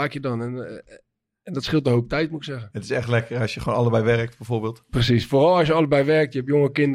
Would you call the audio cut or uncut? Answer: uncut